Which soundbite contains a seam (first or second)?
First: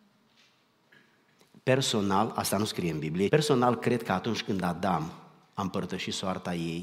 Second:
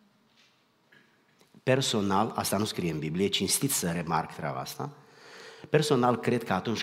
first